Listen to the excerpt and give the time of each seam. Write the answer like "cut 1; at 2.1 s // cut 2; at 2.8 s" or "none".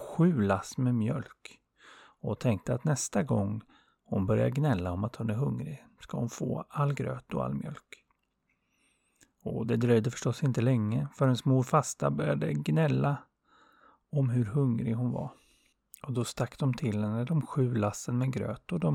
none